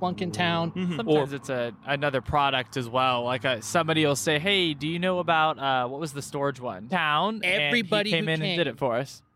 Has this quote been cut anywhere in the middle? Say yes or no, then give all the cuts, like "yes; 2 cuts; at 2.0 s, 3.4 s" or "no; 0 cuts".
yes; 1 cut; at 6.9 s